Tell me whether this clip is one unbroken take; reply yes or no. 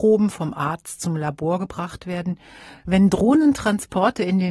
no